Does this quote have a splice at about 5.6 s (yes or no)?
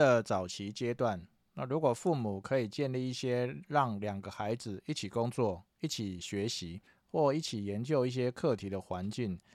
no